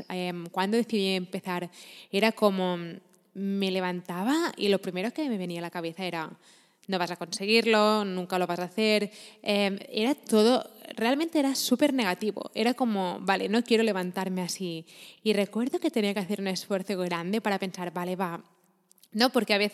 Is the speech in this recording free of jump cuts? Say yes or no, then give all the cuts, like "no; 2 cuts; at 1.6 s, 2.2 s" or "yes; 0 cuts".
yes; 0 cuts